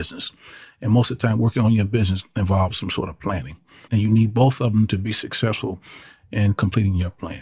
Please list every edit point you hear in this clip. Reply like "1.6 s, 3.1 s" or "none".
3.9 s